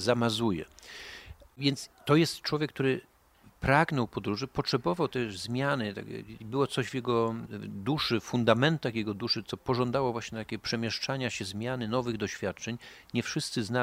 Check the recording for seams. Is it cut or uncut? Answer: uncut